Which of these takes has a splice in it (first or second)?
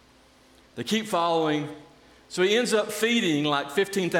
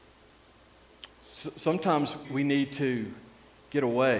second